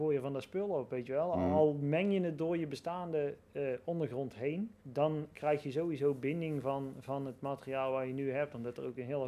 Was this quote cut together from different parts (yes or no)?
yes